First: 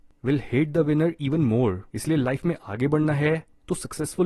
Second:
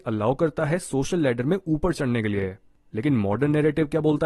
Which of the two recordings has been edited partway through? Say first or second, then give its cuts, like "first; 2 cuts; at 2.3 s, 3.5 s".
first; 1 cut; at 1.9 s